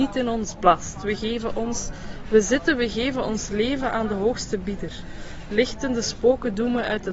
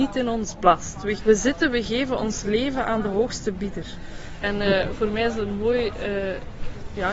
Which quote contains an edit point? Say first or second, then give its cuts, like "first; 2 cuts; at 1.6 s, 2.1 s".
second; 2 cuts; at 1.2 s, 4.4 s